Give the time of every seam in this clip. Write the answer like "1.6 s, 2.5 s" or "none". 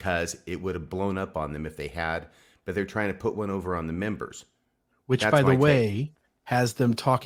none